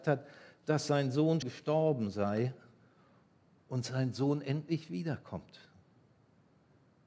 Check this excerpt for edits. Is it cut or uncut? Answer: cut